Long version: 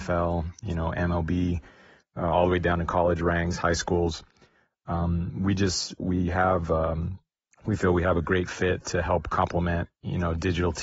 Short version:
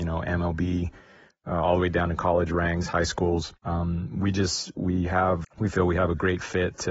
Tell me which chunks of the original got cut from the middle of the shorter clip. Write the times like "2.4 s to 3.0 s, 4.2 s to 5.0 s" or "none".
4.3 s to 4.8 s, 6.7 s to 7.5 s